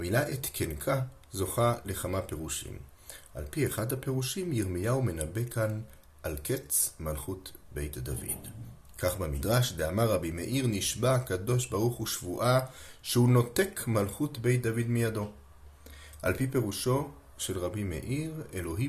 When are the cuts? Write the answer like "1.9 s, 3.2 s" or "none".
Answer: none